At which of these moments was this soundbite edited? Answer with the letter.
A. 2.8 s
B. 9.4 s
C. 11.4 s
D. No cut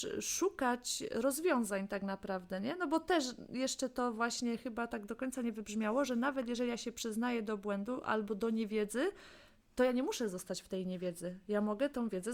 D